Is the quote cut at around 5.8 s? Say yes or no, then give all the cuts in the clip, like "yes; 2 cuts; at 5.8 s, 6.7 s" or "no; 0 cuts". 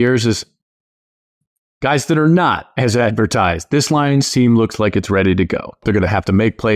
yes; 1 cut; at 5.8 s